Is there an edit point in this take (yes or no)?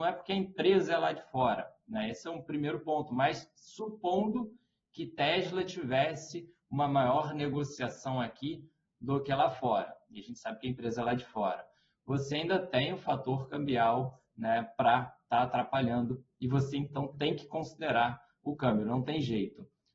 no